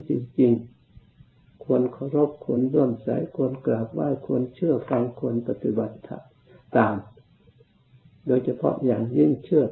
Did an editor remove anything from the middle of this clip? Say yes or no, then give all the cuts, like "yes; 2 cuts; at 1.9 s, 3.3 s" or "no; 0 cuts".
no; 0 cuts